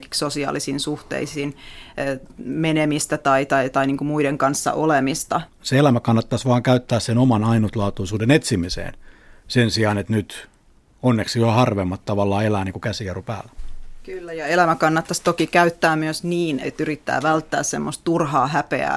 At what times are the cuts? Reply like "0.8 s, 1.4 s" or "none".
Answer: 5.5 s, 16.6 s